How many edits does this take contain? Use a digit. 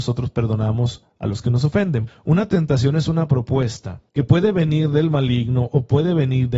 2